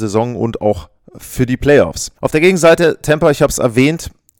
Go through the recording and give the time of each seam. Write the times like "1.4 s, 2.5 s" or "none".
2.2 s

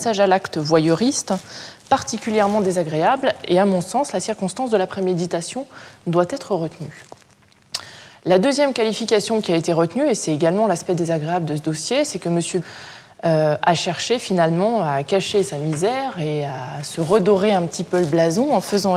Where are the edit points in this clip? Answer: none

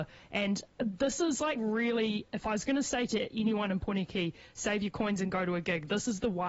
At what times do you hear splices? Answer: none

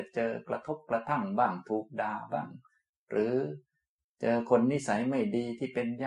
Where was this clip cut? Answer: none

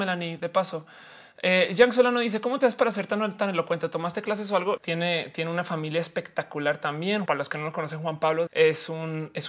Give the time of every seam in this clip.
4.8 s, 7.3 s, 8.5 s

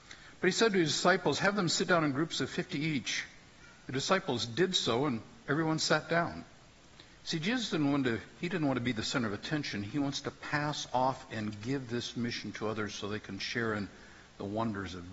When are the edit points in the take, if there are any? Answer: 7.2 s

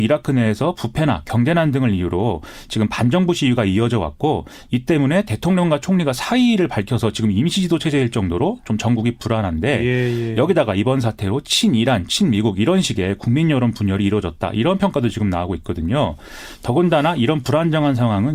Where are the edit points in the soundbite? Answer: none

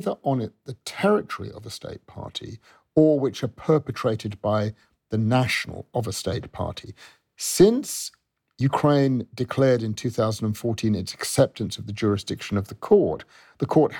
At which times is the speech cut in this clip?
none

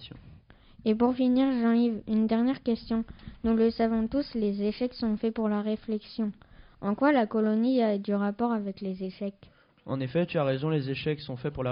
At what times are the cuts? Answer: none

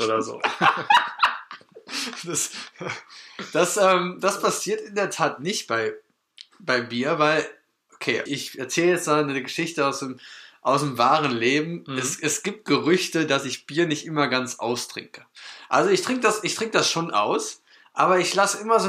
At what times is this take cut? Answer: 8.3 s

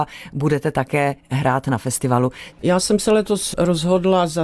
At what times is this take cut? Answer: 2.5 s

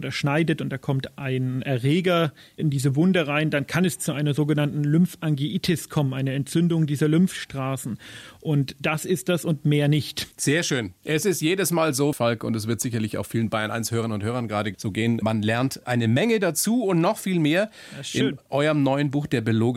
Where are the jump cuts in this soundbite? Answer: 10.3 s, 12.1 s

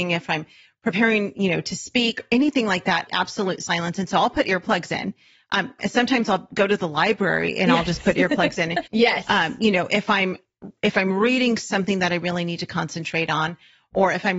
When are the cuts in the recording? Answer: 3.1 s, 5.8 s, 8.9 s

